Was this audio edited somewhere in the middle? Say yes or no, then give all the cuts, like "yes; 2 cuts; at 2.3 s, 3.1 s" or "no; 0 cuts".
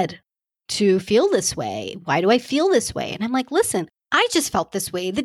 no; 0 cuts